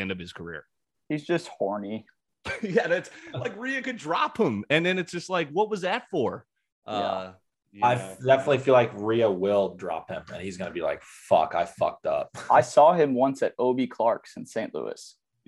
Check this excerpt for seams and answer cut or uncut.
uncut